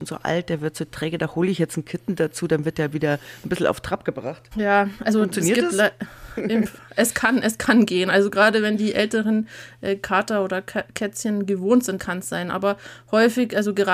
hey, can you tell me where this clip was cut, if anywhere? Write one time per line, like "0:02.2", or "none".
0:04.5
0:12.0